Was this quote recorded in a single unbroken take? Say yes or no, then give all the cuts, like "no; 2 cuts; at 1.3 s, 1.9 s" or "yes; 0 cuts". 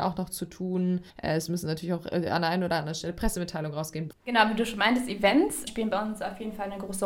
no; 3 cuts; at 1.1 s, 4.1 s, 5.7 s